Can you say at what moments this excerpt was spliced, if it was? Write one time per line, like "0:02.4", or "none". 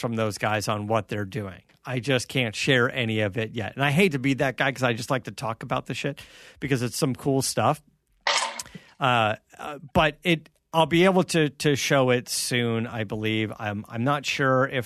none